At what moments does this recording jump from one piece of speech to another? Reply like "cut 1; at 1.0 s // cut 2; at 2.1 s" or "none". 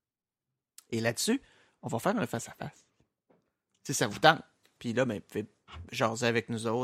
cut 1; at 4.8 s // cut 2; at 5.9 s